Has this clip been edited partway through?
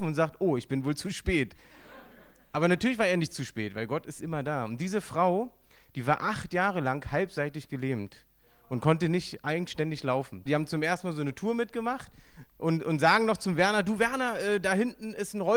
yes; 1 cut; at 10.5 s

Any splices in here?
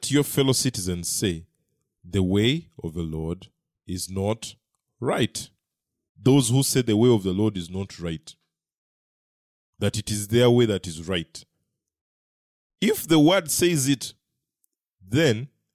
yes; 1 cut; at 6.1 s

